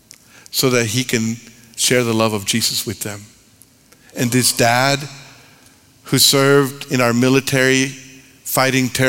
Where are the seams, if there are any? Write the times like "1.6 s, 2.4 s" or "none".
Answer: none